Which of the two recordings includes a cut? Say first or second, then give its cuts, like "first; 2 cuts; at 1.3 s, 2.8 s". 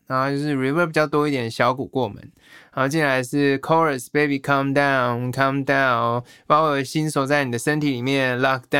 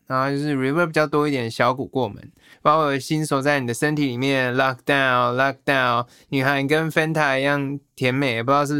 second; 1 cut; at 2.5 s